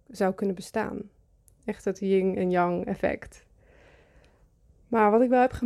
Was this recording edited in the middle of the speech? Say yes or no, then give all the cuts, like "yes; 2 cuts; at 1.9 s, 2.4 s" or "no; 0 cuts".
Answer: no; 0 cuts